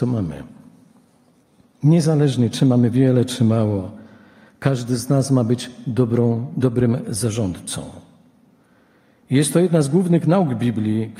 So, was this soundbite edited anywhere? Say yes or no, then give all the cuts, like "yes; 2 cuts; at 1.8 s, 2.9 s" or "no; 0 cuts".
no; 0 cuts